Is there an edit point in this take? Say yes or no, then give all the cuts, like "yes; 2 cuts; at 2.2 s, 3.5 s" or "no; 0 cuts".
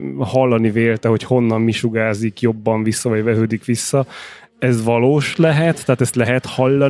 no; 0 cuts